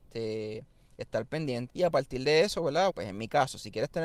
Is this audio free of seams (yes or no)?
no